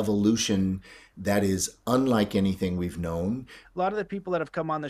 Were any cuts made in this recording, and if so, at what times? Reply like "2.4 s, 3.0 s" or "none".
3.6 s